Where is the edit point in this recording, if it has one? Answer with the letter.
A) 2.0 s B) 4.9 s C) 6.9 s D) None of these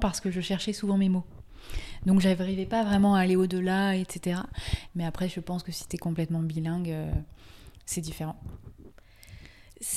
B